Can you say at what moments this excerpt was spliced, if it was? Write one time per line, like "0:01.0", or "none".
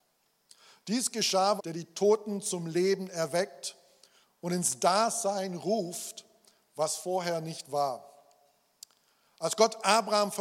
0:01.6